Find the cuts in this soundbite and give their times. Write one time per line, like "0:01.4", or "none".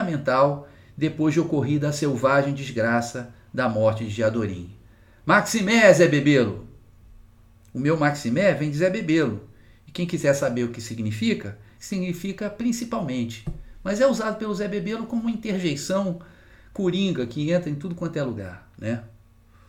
0:11.8